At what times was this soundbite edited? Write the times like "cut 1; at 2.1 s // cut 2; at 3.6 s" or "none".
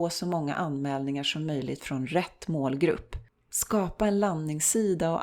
cut 1; at 3.3 s